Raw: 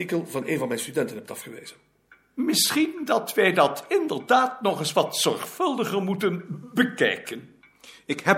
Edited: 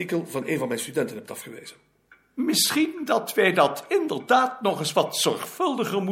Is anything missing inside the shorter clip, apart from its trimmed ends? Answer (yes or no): no